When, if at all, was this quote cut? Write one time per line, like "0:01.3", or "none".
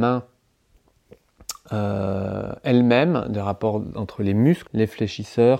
0:04.7